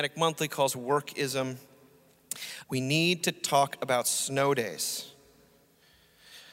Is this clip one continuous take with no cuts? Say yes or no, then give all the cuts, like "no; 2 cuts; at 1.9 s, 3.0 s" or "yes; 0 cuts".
no; 1 cut; at 2.6 s